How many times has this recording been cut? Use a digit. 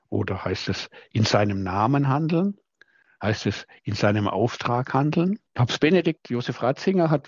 1